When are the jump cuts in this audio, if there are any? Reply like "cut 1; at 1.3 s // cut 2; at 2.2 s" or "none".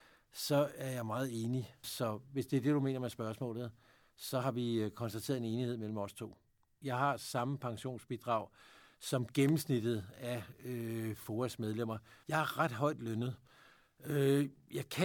cut 1; at 1.8 s // cut 2; at 6.8 s // cut 3; at 12.2 s